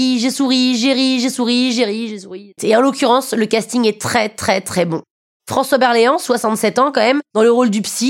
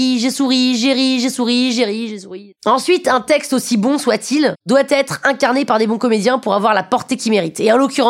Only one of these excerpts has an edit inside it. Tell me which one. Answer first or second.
first